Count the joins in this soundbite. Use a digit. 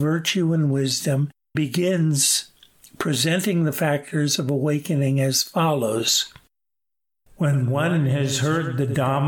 1